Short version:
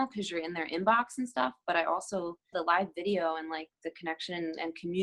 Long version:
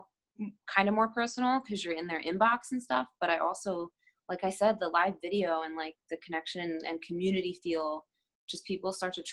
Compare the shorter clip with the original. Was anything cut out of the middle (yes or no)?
yes